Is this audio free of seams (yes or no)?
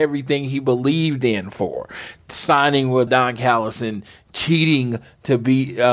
no